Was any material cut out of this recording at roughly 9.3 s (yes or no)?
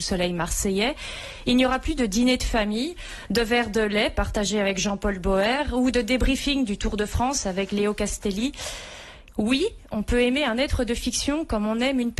yes